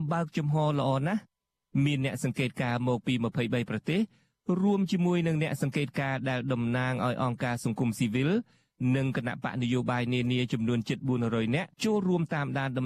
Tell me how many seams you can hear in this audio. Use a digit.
1